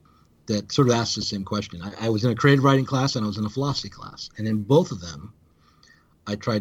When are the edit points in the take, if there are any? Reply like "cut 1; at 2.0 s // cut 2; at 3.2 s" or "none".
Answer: none